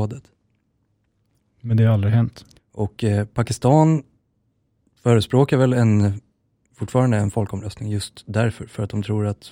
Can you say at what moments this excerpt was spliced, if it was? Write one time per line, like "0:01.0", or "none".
0:02.6